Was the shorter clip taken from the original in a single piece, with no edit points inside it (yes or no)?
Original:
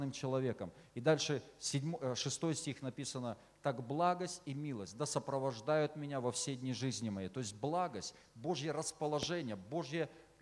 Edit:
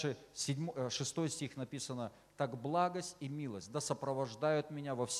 yes